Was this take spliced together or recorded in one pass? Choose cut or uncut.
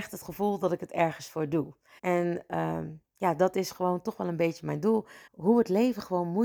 cut